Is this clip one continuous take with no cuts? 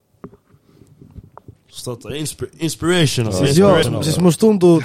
no; 1 cut; at 3.8 s

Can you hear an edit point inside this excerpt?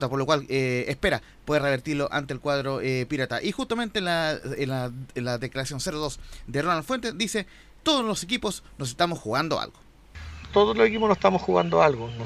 no; 0 cuts

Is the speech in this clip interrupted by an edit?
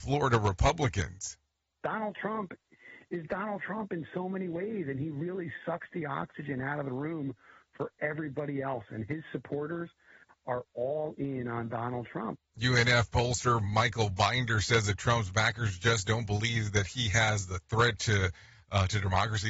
no; 0 cuts

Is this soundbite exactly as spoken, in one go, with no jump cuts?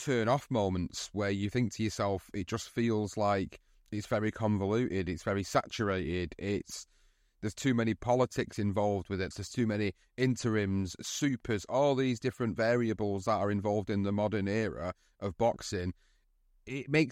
no; 1 cut; at 9.3 s

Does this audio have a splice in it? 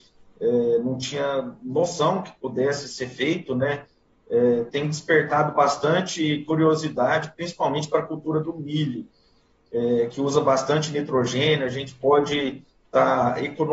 yes; 1 cut; at 4.7 s

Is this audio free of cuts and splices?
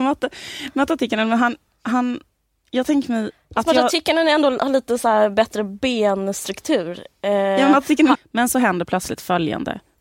no; 1 cut; at 8.1 s

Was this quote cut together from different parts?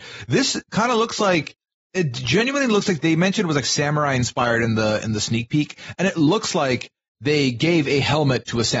no; 0 cuts

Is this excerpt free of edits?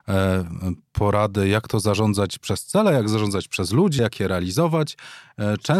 no; 1 cut; at 4.0 s

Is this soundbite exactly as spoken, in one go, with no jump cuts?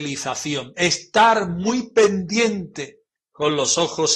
yes; 0 cuts

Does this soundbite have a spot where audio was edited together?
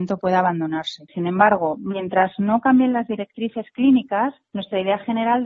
yes; 1 cut; at 1.1 s

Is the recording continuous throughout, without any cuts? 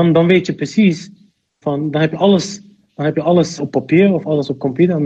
no; 2 cuts; at 1.6 s, 3.6 s

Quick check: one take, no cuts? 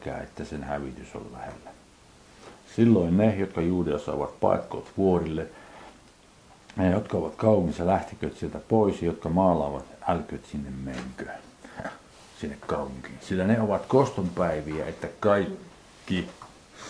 yes; 0 cuts

